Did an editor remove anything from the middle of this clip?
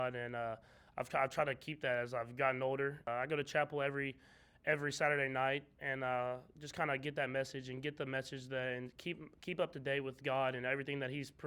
yes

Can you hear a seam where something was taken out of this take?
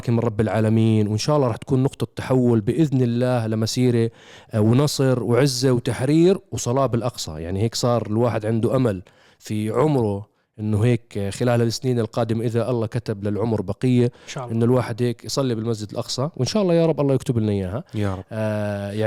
no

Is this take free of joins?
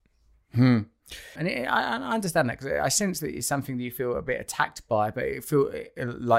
no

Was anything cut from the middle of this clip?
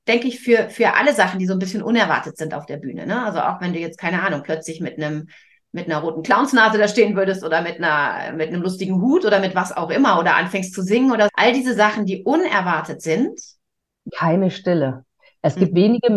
yes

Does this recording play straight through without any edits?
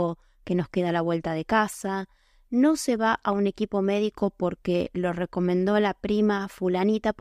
no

